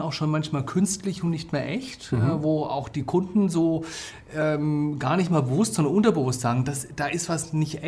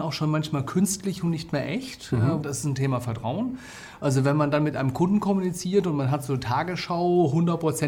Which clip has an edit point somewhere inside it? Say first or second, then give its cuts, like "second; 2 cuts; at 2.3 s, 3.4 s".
second; 2 cuts; at 2.4 s, 4.0 s